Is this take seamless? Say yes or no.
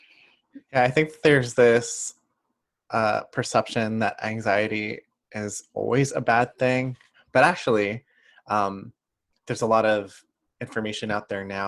yes